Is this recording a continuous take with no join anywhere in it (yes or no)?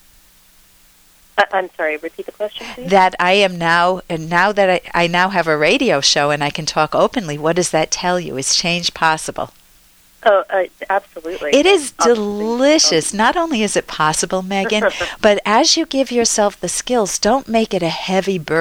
yes